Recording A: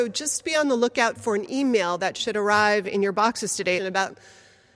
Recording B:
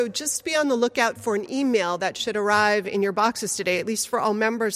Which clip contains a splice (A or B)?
A